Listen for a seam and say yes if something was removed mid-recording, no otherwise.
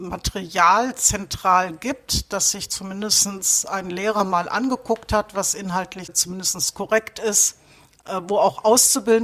yes